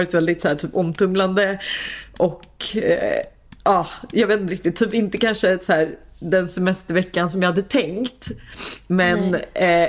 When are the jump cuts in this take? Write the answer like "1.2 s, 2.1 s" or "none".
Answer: none